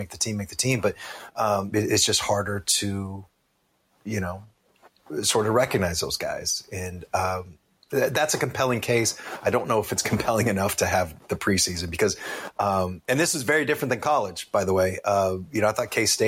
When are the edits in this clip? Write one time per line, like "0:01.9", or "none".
0:01.7